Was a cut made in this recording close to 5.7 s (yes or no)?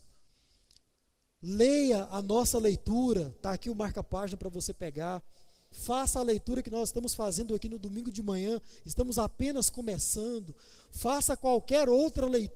yes